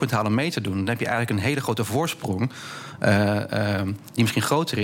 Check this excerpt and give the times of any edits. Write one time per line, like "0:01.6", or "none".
none